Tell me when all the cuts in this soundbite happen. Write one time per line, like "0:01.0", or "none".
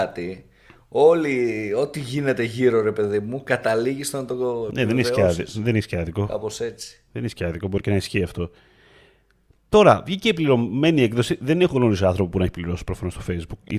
none